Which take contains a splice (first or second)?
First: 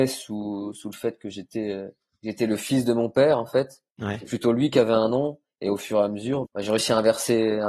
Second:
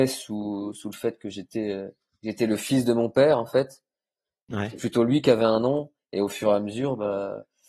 first